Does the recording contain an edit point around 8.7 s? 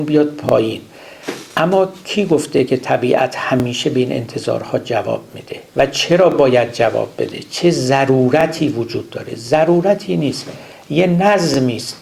no; 1 cut; at 5.7 s

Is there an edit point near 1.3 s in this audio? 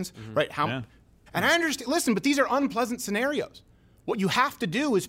yes; 1 cut; at 1.3 s

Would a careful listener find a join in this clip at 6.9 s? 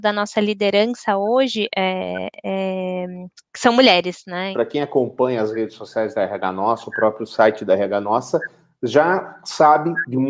no; 1 cut; at 4.5 s

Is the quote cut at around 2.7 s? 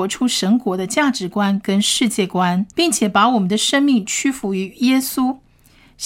yes; 1 cut; at 2.7 s

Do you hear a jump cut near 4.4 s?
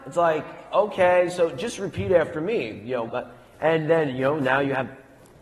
no; 1 cut; at 3.1 s

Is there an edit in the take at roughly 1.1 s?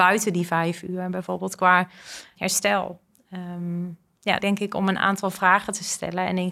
no; 2 cuts; at 2.4 s, 4.4 s

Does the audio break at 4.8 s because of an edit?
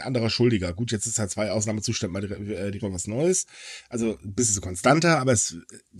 no; 1 cut; at 2.8 s

